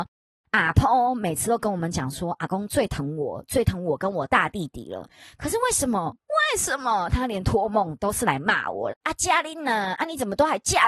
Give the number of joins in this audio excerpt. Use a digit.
1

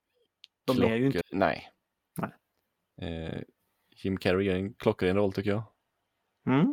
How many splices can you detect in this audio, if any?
1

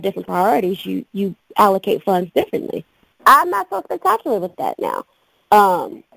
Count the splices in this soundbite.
1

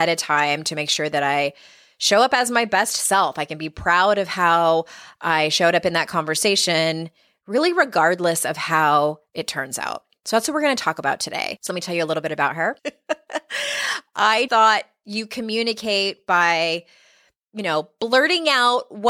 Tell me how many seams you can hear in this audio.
3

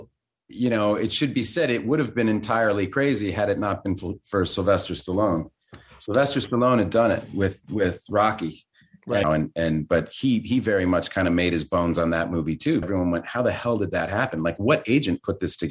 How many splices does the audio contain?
2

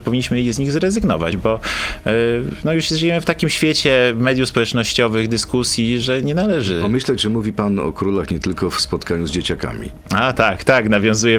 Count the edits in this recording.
0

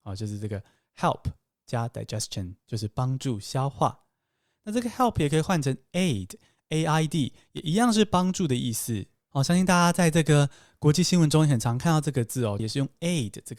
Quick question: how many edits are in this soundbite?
1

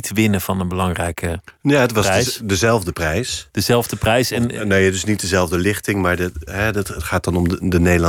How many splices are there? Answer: 0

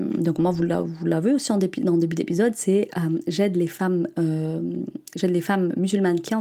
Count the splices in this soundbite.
1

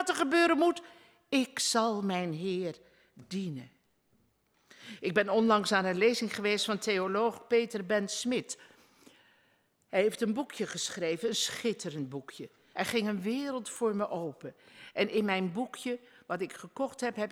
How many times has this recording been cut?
1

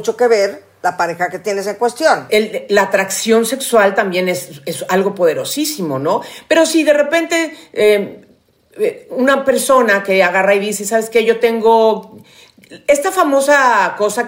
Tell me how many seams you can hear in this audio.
1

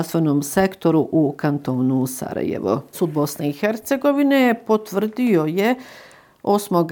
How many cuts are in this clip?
1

